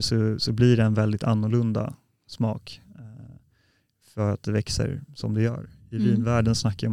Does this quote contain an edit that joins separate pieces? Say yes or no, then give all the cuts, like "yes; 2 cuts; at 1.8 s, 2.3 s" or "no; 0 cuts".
no; 0 cuts